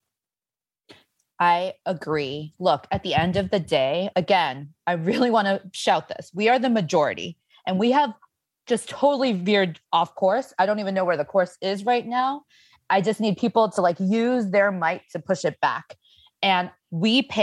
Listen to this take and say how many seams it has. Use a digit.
0